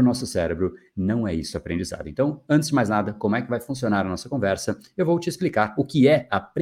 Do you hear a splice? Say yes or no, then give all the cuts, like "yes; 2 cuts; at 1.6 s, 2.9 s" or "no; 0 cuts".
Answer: no; 0 cuts